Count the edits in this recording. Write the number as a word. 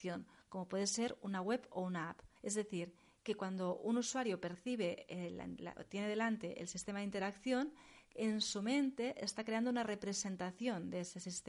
one